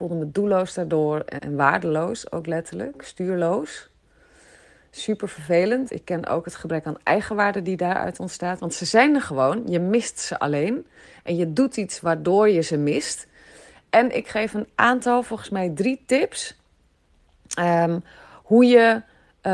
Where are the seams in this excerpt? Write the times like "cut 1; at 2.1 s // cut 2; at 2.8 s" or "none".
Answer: cut 1; at 1.4 s // cut 2; at 5.9 s // cut 3; at 8.6 s